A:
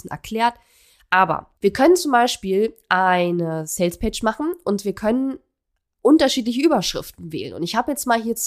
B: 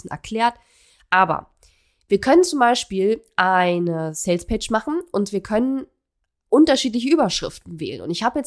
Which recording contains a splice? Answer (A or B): A